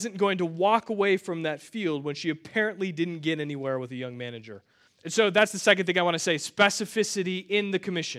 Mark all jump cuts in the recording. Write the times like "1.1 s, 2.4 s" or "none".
4.9 s